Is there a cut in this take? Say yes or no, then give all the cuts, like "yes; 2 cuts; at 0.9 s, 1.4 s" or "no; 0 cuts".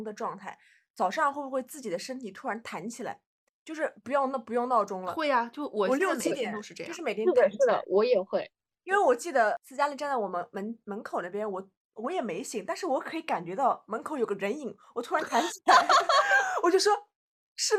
no; 0 cuts